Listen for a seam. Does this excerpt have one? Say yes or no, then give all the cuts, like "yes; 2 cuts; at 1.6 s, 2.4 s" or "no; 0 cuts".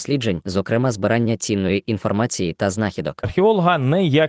yes; 1 cut; at 3.2 s